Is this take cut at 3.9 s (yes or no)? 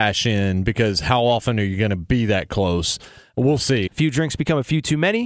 yes